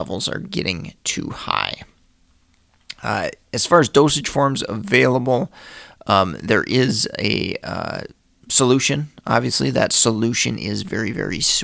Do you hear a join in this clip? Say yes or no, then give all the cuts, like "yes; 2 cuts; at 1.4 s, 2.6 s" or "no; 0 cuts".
no; 0 cuts